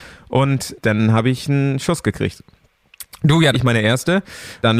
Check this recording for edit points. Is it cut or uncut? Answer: cut